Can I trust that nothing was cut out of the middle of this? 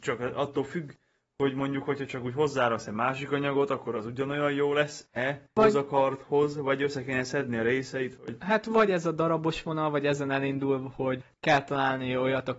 yes; 0 cuts

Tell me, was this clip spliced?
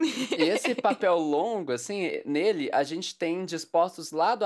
no; 0 cuts

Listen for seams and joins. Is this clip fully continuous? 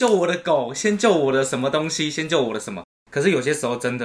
yes; 0 cuts

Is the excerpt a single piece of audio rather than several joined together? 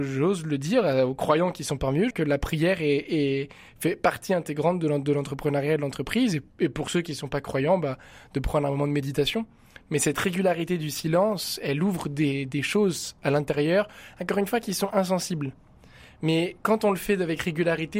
no; 1 cut; at 2.1 s

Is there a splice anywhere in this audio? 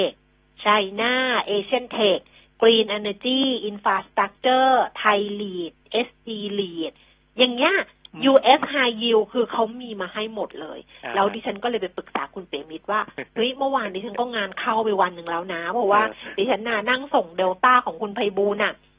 no; 0 cuts

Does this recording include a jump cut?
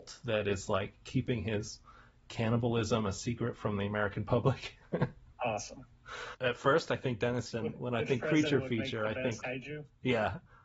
yes; 3 cuts; at 6.3 s, 7.5 s, 9.4 s

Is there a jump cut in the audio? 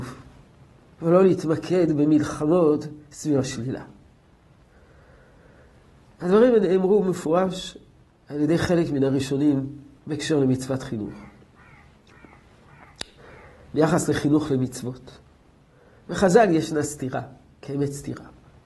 no; 0 cuts

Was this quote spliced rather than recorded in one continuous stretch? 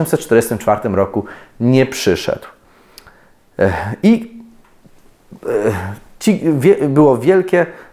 no; 0 cuts

